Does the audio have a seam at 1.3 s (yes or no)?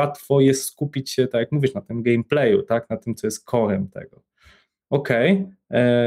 no